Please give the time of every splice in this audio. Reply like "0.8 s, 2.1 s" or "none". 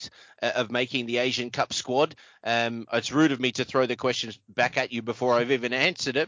none

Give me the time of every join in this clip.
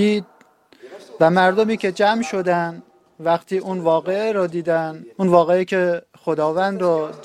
5.1 s

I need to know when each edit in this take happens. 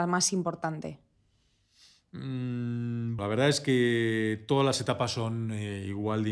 3.2 s

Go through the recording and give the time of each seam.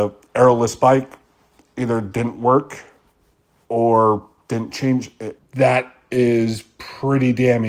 5.4 s

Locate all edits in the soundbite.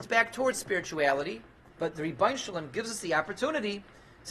1.7 s

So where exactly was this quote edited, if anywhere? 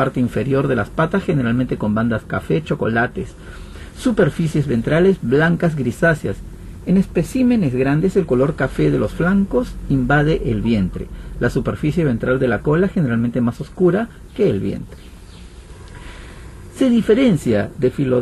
none

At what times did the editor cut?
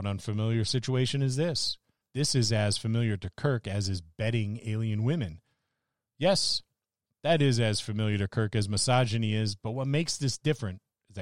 2.0 s

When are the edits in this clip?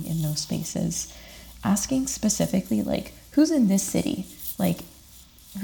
none

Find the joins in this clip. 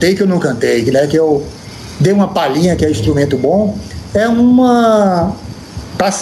none

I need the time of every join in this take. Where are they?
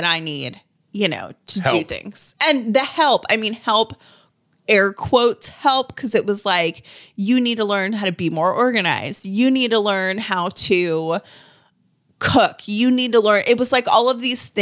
none

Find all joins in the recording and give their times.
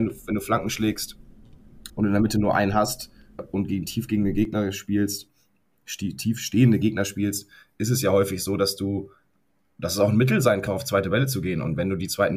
1.9 s, 3.4 s, 10.7 s

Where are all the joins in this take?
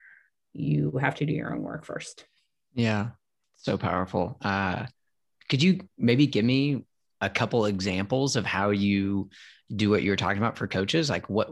3.4 s

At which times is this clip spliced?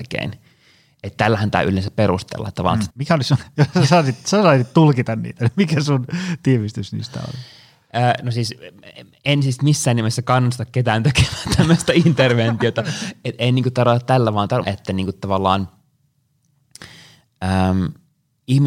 2.9 s, 14.6 s

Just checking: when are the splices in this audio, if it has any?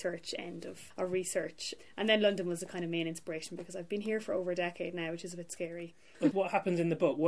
6.3 s

